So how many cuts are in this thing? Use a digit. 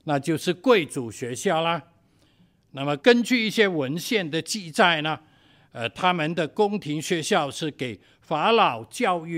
1